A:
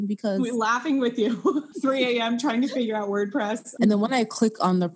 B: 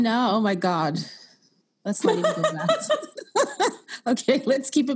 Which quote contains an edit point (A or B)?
A